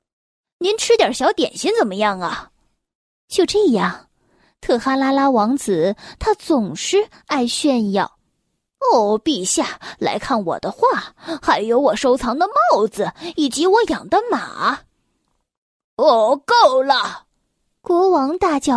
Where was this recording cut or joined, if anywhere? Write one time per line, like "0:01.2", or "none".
none

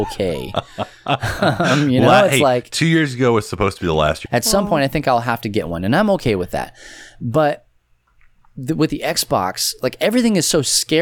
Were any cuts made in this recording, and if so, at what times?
0:04.2

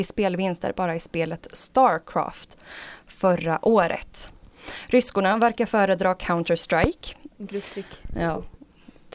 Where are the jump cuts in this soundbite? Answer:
0:07.3

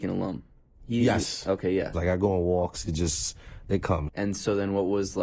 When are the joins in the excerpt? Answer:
0:01.9
0:04.1

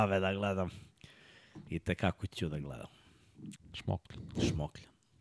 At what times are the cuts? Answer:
0:03.6

